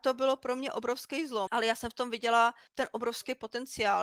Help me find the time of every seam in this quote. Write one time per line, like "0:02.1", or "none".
0:01.5
0:02.7